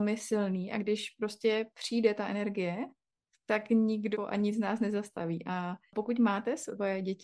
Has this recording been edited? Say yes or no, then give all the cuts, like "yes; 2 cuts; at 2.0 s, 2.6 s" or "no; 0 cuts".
no; 0 cuts